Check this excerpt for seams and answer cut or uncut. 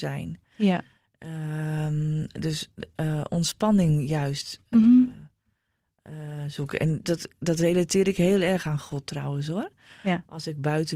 uncut